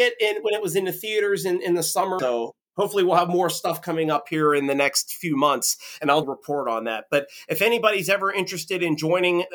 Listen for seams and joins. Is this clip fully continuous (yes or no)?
no